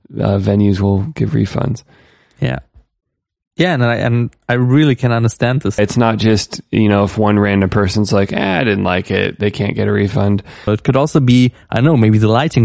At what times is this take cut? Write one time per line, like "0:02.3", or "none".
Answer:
0:05.8
0:10.7